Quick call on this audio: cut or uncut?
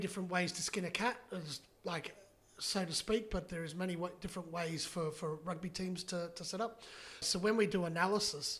cut